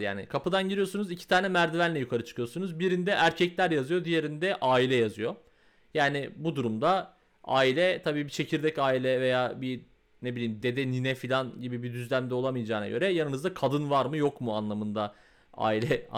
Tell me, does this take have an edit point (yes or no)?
yes